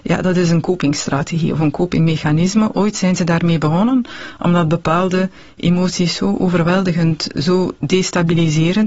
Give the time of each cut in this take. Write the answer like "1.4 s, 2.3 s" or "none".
none